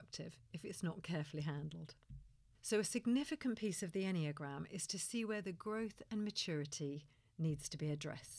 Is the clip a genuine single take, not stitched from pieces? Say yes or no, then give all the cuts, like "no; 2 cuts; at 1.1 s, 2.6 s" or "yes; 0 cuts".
yes; 0 cuts